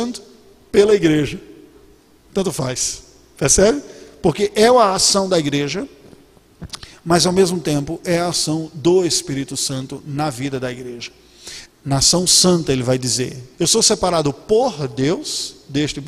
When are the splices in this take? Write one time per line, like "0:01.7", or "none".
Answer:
0:11.7
0:13.5